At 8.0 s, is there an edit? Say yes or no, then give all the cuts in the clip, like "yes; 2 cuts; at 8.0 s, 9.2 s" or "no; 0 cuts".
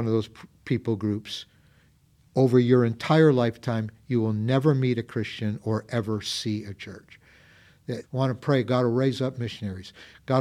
yes; 1 cut; at 8.0 s